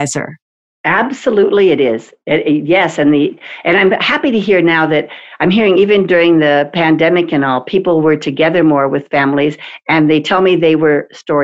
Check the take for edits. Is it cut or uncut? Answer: uncut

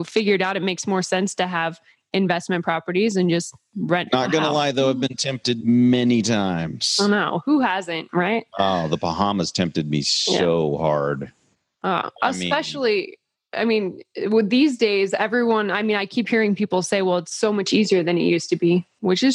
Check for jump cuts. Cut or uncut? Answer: uncut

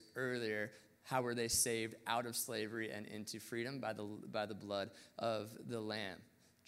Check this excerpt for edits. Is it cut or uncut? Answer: uncut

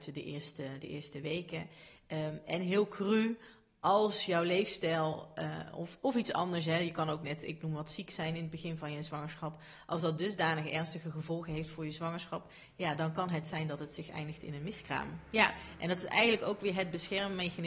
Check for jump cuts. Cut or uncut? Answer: uncut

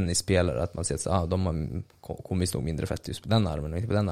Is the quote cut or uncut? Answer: uncut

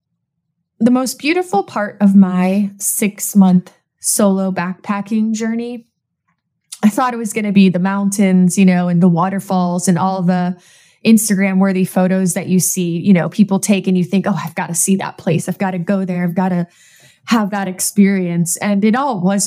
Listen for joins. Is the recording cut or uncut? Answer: uncut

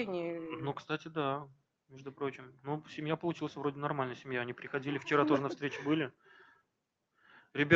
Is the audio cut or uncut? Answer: uncut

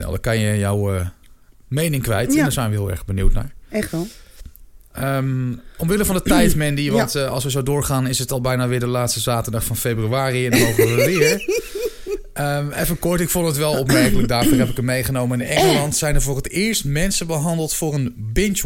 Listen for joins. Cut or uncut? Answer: uncut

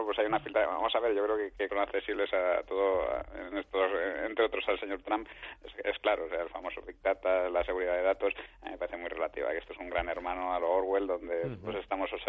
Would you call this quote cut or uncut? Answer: cut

